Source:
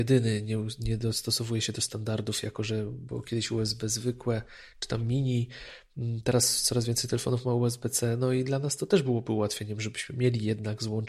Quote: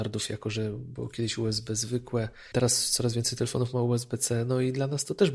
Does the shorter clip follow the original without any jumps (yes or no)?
no